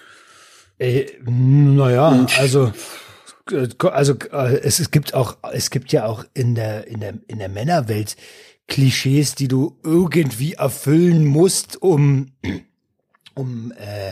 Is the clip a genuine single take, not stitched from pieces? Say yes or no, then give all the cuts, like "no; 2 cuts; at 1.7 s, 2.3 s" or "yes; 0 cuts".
yes; 0 cuts